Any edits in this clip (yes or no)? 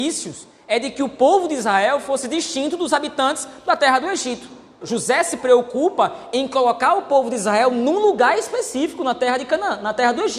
yes